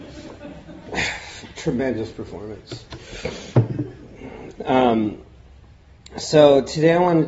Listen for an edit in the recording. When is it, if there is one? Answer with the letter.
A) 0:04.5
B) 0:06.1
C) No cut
A